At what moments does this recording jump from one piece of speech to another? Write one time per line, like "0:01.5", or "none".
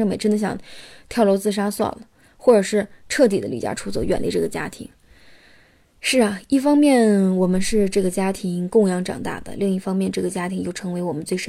none